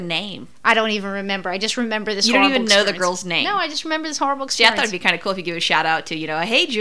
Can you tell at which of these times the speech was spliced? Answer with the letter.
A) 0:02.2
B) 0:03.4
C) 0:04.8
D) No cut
D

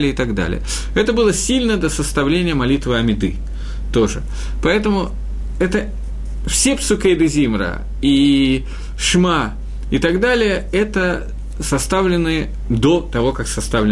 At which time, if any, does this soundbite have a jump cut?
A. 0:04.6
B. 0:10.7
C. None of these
C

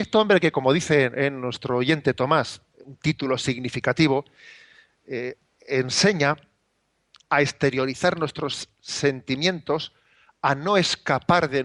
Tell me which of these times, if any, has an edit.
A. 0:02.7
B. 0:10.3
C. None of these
A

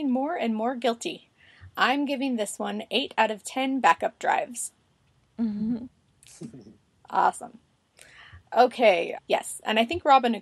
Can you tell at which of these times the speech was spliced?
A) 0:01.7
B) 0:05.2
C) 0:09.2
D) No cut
C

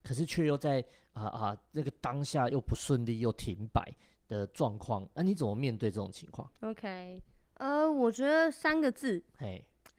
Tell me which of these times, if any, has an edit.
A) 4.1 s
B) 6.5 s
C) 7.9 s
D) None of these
B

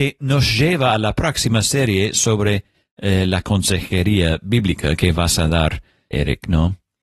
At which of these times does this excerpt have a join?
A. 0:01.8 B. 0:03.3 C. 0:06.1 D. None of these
C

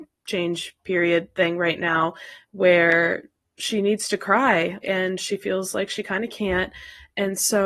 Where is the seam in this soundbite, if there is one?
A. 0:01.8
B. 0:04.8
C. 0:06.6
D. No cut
B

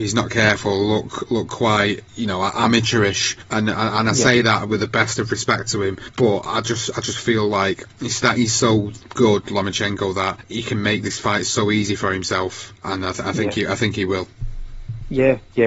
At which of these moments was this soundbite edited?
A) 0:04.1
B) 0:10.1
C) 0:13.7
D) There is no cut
D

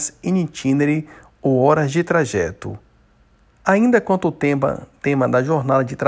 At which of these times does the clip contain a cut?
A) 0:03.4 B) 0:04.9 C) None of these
A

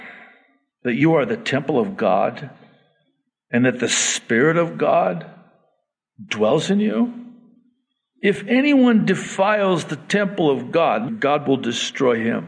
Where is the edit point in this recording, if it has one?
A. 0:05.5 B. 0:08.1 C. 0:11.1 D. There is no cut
C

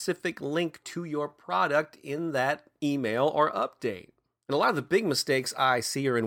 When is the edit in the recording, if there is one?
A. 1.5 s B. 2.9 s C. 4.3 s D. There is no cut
D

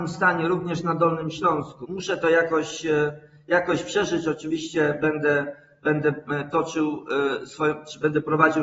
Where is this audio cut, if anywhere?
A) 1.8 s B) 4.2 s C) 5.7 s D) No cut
A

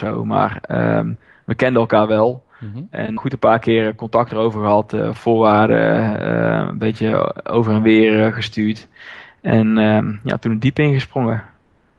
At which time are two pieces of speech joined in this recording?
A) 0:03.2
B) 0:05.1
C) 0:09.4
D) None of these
A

